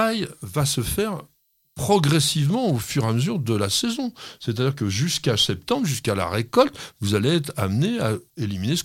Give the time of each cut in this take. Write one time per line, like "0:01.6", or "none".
none